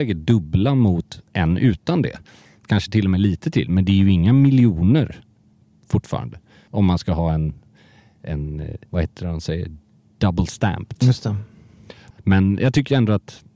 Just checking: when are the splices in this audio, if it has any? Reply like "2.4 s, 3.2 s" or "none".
6.7 s, 8.9 s, 12.1 s